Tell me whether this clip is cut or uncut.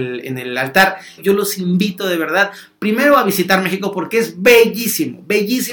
cut